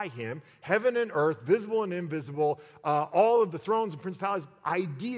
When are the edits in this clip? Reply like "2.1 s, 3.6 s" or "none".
none